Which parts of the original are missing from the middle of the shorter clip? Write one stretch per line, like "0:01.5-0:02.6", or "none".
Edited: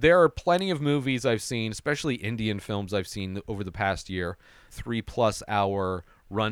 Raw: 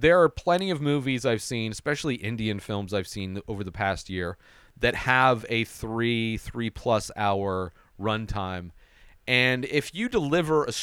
0:04.7-0:06.4